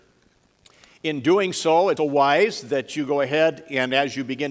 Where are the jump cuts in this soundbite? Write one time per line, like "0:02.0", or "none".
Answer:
0:02.0